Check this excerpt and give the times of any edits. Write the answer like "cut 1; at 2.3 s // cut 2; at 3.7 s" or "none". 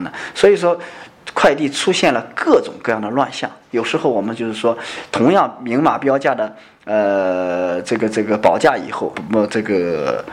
cut 1; at 9.1 s